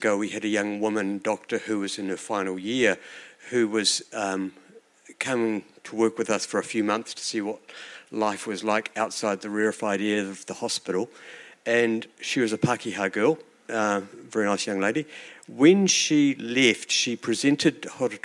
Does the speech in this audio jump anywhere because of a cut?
yes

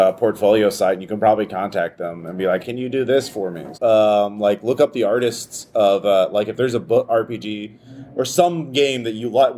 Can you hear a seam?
yes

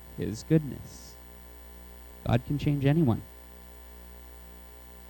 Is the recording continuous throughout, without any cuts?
no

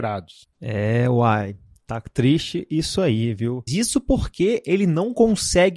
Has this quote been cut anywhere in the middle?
yes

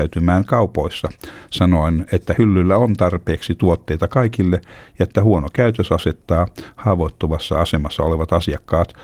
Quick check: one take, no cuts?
yes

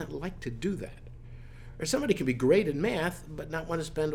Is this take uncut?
yes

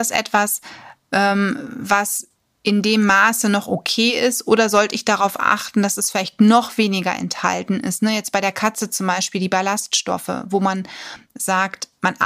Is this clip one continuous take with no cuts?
yes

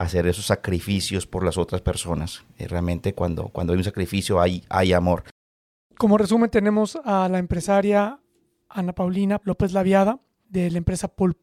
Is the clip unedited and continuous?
yes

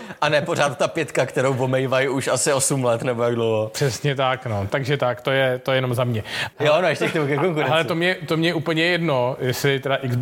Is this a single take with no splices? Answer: no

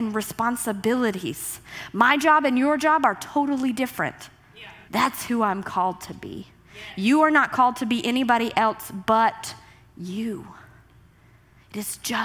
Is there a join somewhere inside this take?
yes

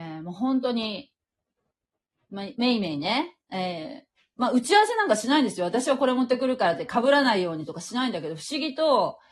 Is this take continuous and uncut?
no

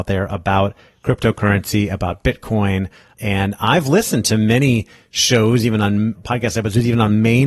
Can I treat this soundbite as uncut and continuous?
yes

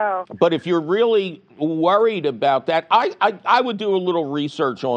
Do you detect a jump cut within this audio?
no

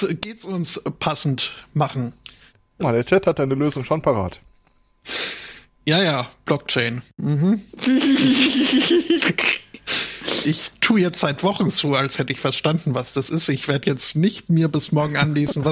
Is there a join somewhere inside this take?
yes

